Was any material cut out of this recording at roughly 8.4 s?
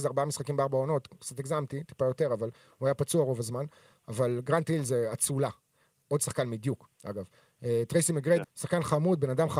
yes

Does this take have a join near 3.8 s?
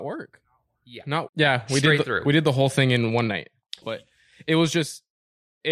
yes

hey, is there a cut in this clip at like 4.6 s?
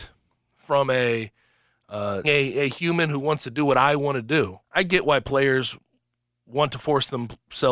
yes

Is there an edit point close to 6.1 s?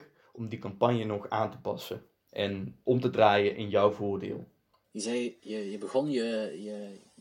no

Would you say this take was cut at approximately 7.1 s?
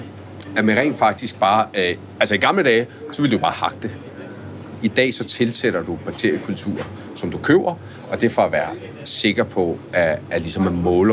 no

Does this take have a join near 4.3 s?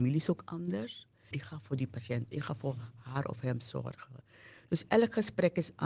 no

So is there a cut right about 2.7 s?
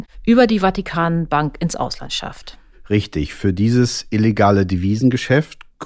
no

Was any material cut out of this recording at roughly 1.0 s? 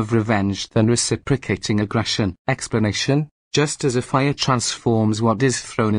no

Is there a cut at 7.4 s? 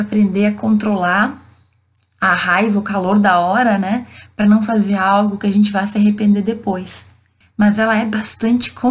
yes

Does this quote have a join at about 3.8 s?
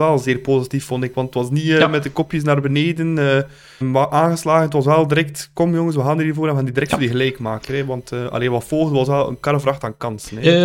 yes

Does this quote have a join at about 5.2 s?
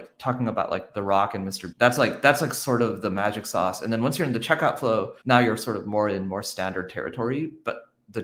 yes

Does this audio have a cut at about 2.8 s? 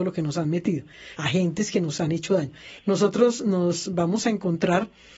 yes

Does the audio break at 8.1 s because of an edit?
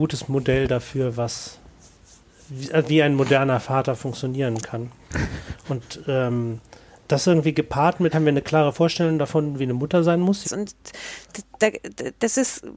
yes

